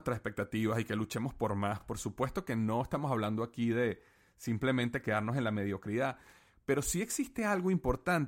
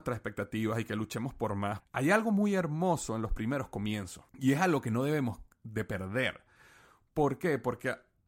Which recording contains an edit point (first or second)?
second